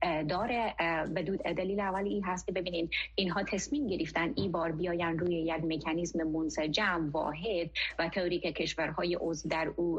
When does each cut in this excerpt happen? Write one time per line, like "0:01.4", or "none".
0:01.4

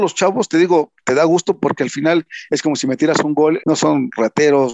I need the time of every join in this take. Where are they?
0:01.0
0:03.6

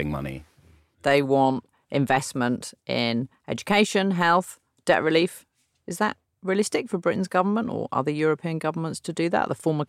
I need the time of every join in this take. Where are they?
0:00.9

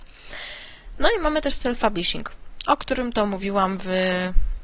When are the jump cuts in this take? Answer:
none

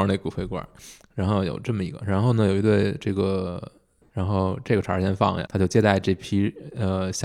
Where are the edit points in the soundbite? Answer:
0:04.0
0:05.5

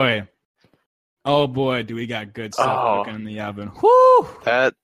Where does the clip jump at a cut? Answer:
none

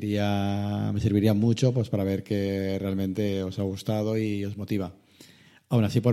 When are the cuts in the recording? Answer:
none

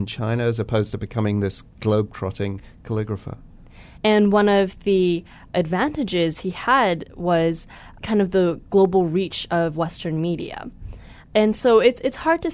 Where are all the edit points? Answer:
0:04.0

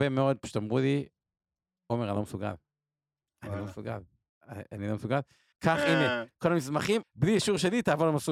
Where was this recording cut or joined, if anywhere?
0:05.5
0:07.0

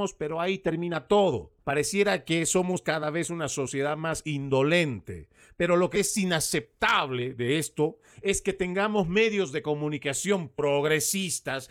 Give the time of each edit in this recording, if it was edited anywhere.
0:01.6
0:05.9

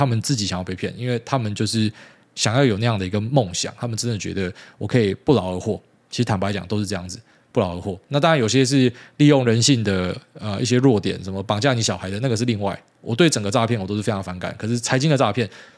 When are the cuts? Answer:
none

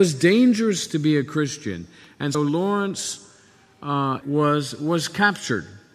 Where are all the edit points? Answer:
0:02.3
0:04.2

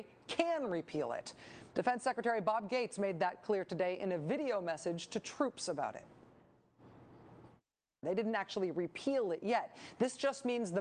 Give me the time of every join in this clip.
0:01.7
0:08.0

